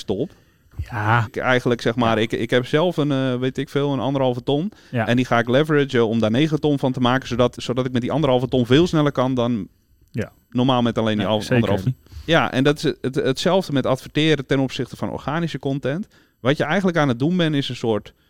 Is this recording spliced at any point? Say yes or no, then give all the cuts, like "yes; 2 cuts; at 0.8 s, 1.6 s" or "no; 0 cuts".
yes; 3 cuts; at 1.3 s, 7.5 s, 11.9 s